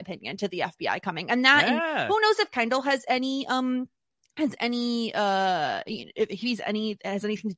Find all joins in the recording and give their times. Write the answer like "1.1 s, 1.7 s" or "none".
none